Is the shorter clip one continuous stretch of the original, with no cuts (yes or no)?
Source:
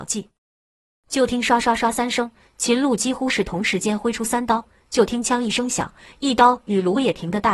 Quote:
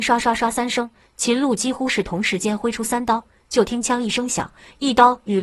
yes